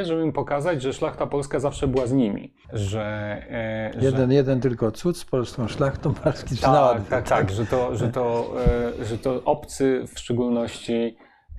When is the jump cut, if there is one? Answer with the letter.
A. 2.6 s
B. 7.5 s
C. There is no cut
A